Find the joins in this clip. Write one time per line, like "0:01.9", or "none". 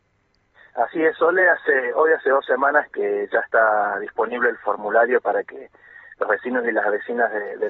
none